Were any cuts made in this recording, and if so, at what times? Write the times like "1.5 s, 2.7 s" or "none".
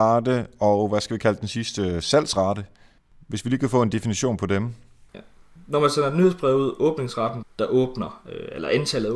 5.1 s, 7.4 s